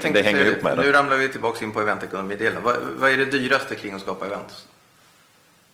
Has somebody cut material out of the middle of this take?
no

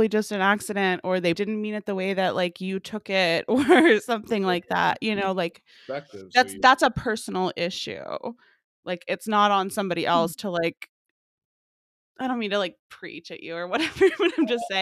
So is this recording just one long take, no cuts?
no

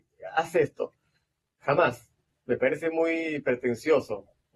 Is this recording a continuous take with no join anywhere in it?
yes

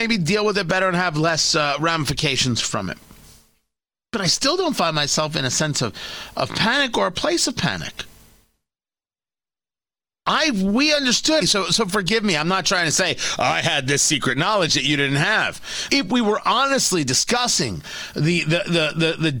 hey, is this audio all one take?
no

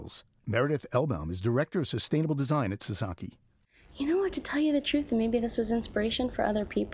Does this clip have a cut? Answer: no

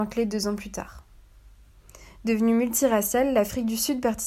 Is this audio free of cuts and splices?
yes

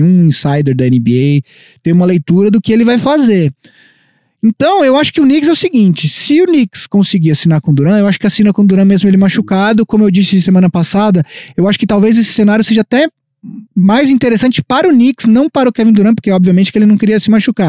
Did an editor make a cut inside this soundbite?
yes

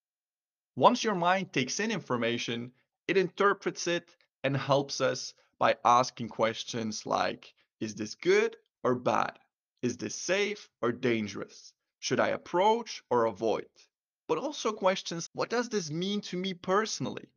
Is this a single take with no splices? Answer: no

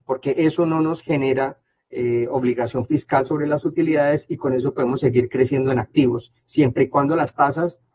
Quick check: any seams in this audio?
no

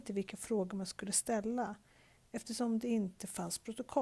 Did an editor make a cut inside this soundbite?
no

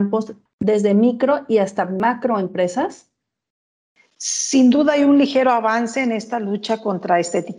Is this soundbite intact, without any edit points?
yes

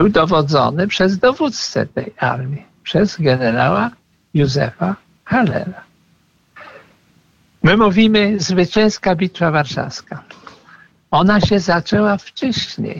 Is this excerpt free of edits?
yes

